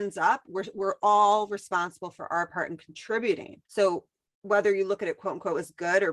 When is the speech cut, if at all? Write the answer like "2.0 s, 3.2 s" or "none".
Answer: 3.6 s